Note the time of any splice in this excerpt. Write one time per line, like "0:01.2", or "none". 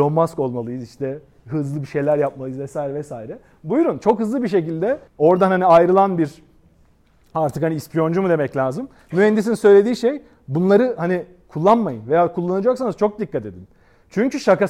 0:05.1